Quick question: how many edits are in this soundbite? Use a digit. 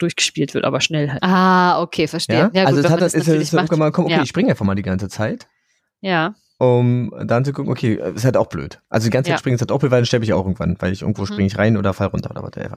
1